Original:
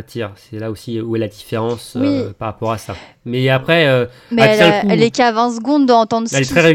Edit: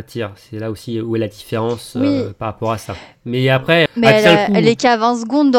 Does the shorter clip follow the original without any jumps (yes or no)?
no